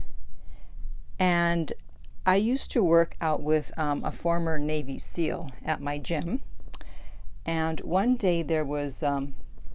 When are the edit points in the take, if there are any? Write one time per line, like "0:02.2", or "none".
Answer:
none